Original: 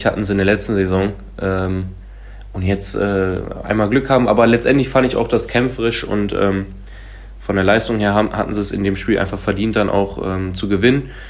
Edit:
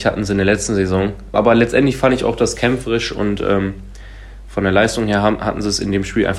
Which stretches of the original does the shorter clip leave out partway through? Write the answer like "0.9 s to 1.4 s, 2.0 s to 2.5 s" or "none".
1.3 s to 4.3 s

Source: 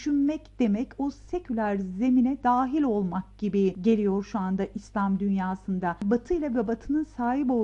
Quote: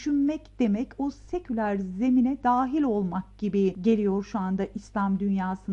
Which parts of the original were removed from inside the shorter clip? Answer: none

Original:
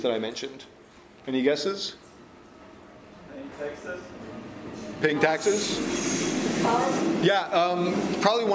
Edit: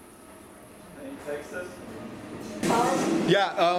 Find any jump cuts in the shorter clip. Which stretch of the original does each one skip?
5.0 s to 6.6 s

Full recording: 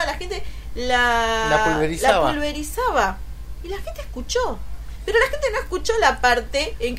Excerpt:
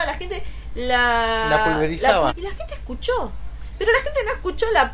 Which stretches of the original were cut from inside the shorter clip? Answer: 2.3 s to 3.6 s

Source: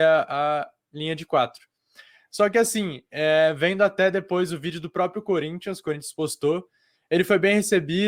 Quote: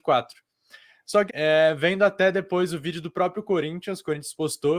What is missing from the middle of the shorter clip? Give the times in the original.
2.5 s to 3.1 s

